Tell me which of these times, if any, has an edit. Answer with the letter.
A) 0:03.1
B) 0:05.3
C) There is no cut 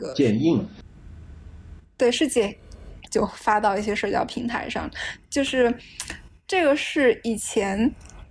A